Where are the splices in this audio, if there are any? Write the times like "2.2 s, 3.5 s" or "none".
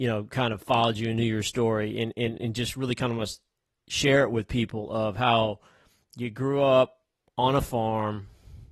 none